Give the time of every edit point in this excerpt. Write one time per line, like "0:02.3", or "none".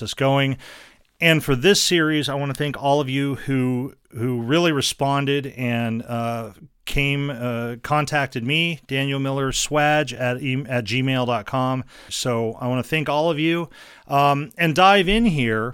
0:12.1